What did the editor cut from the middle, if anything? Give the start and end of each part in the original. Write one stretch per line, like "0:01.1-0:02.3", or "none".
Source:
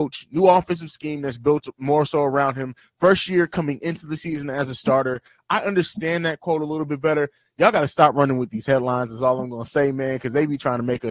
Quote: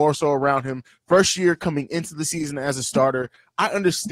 none